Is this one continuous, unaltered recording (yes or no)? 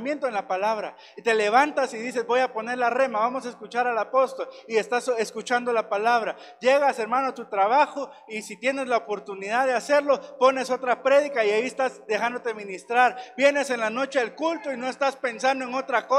yes